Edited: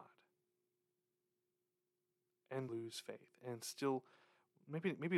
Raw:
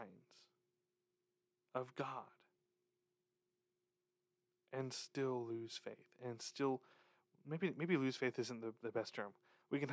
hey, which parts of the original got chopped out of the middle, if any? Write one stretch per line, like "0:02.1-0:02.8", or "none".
0:04.9-0:05.5